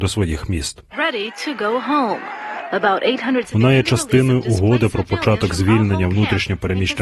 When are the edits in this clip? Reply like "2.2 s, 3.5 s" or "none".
0.9 s, 3.4 s